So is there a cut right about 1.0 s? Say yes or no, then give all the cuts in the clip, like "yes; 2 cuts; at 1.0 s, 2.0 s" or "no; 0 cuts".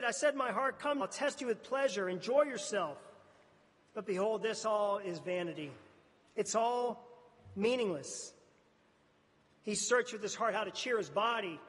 yes; 1 cut; at 1.0 s